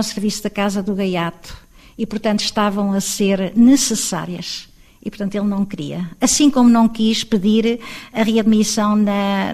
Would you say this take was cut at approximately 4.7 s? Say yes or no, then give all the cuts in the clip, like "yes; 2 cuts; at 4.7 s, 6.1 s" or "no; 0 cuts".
no; 0 cuts